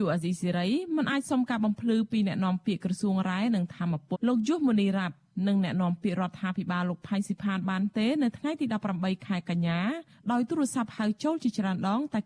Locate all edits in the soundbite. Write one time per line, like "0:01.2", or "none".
0:04.1

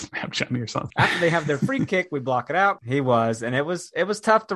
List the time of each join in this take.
0:00.9
0:02.8

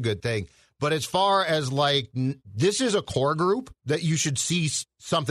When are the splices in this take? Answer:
0:02.4
0:03.8

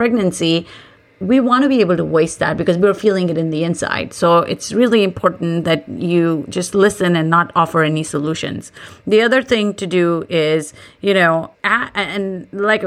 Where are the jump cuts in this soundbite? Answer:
0:11.5

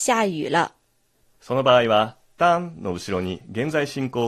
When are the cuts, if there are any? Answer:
0:01.2

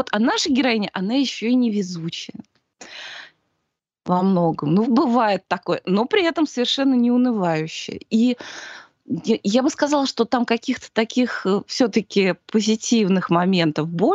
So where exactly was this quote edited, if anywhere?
0:04.8

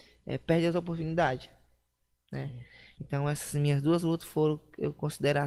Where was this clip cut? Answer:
0:03.0

